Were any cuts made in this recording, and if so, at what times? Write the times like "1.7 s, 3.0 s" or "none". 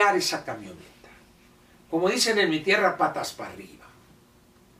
none